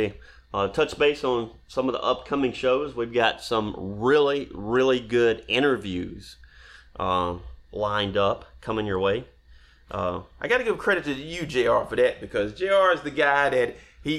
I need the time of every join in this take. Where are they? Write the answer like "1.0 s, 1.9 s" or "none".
7.6 s

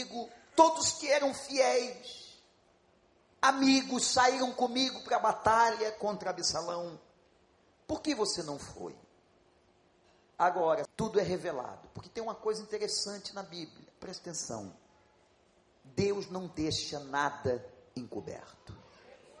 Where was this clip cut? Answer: 10.9 s

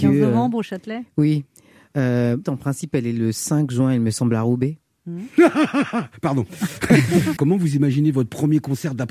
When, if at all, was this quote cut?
2.4 s, 7.4 s

